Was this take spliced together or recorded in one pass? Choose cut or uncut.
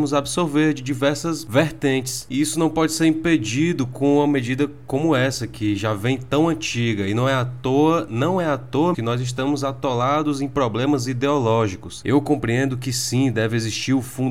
cut